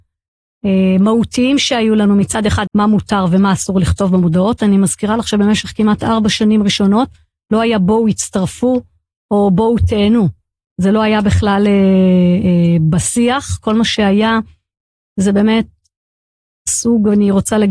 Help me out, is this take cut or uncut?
cut